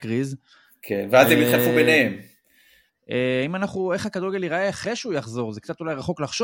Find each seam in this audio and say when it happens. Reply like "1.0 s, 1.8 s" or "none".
2.9 s